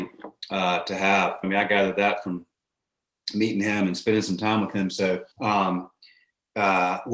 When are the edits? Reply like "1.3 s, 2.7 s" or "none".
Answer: 1.4 s, 5.3 s